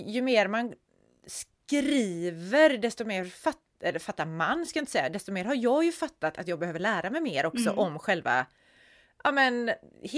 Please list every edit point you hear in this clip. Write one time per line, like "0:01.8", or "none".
none